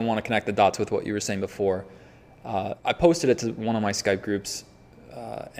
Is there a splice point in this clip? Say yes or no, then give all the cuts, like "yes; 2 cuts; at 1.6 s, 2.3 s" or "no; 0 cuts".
yes; 1 cut; at 2.8 s